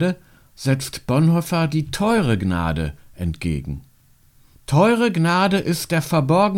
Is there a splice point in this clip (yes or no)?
yes